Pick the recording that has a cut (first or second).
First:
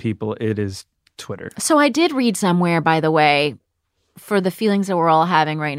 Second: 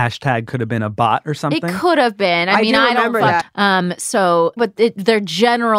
second